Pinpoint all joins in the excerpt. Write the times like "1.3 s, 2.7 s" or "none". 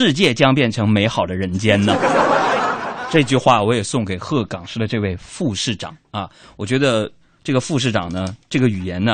none

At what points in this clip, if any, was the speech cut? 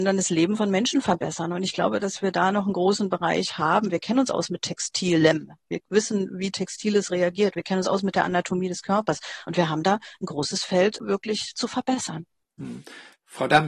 none

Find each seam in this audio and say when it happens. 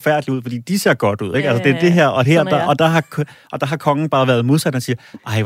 none

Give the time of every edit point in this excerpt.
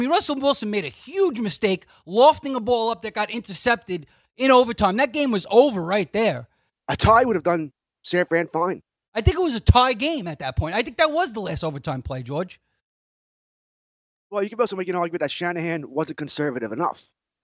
6.7 s, 9.1 s

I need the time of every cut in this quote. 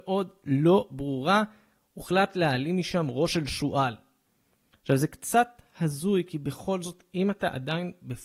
none

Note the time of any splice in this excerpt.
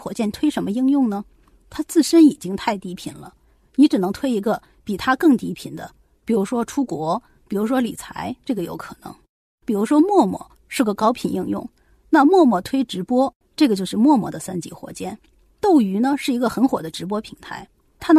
13.4 s

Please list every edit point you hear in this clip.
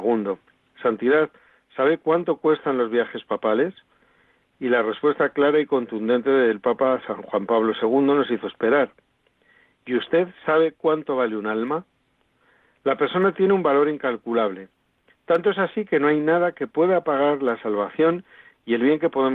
none

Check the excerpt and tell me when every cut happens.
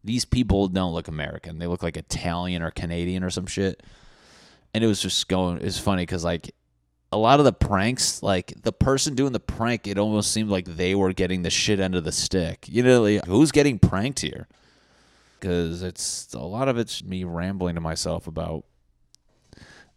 13.2 s, 15.4 s, 17.0 s

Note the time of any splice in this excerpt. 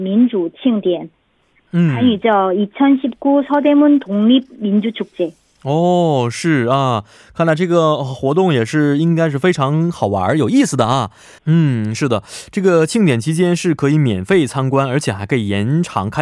11.4 s

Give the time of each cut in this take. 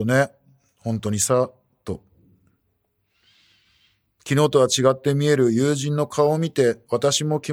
none

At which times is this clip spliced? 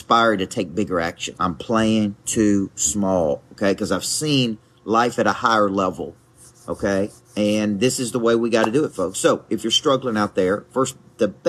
1.3 s

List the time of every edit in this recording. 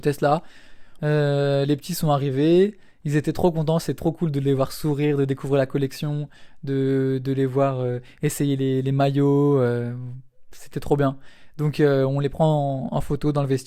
1.0 s

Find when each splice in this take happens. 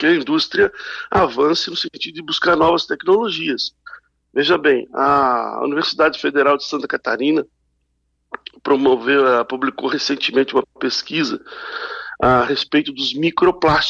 none

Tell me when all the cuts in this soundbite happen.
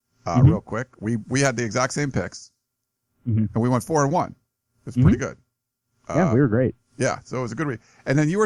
none

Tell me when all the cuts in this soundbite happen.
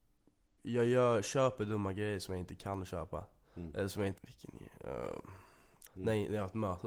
4.2 s, 5.9 s

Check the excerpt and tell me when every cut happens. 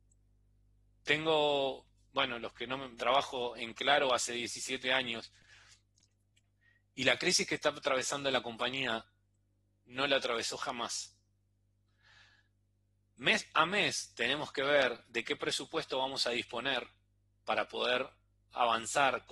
3.0 s

